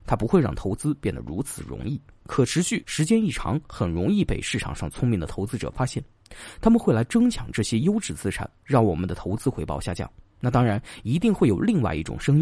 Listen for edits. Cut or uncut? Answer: cut